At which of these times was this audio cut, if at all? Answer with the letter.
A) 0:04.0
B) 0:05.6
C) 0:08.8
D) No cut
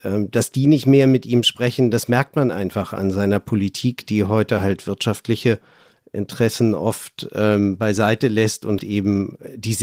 C